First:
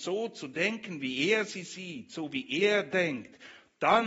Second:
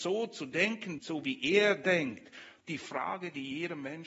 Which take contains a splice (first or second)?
second